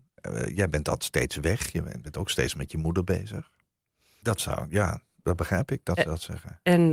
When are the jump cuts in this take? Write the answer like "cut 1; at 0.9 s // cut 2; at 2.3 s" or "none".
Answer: cut 1; at 4.2 s